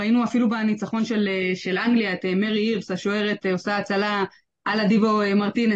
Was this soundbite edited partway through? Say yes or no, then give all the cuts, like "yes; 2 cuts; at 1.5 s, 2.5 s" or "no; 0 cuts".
no; 0 cuts